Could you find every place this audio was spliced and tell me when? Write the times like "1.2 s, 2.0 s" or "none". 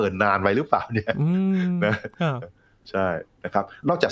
2.4 s